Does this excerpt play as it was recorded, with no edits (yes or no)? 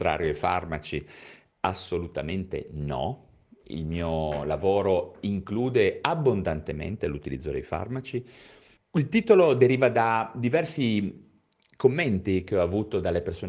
no